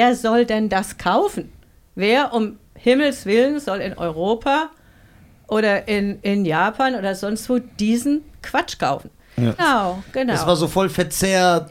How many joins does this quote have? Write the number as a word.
one